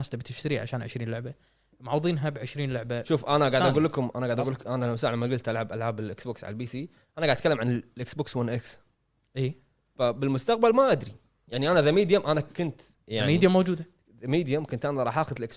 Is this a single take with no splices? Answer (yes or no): yes